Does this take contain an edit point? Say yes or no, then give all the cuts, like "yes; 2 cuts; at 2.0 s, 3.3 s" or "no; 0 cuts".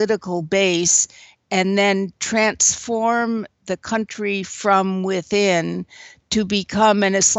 no; 0 cuts